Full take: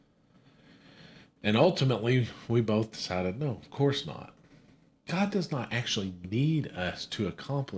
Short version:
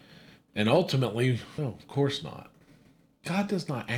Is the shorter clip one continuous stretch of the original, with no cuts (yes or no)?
no